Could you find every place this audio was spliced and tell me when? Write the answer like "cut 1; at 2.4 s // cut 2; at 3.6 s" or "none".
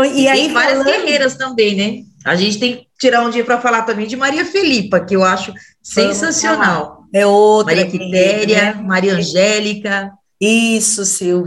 none